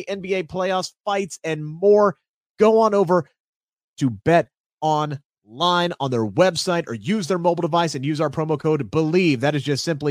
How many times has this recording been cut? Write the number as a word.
zero